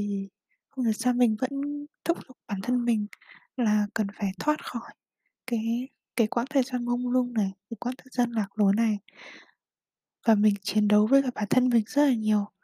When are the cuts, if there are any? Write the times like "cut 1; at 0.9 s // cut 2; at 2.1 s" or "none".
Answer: none